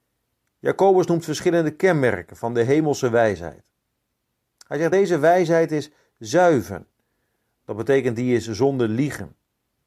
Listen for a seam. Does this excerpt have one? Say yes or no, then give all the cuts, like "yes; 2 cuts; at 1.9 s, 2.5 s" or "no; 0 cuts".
no; 0 cuts